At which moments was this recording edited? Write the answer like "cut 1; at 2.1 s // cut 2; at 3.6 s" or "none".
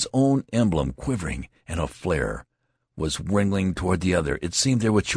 none